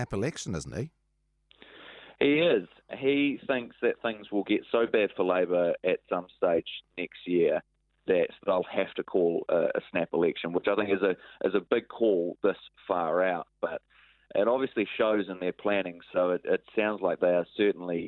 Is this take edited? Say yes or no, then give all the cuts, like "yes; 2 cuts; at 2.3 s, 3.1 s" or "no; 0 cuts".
yes; 1 cut; at 16.0 s